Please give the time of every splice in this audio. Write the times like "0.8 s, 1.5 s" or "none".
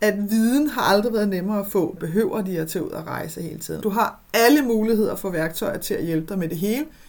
2.0 s, 3.8 s